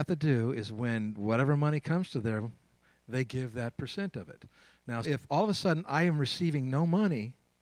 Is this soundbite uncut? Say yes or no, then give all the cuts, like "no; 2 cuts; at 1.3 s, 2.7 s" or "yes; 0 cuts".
no; 1 cut; at 5.0 s